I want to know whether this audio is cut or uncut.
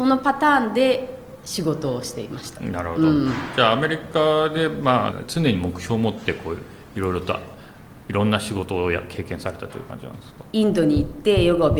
cut